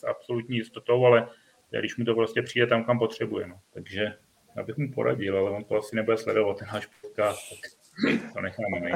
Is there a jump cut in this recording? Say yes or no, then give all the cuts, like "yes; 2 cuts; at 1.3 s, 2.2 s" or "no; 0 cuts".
yes; 1 cut; at 3.7 s